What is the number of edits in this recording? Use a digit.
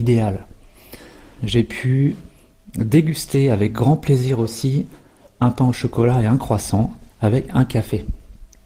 1